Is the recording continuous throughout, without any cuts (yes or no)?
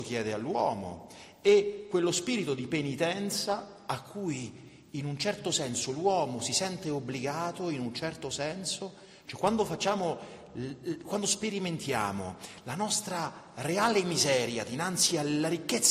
no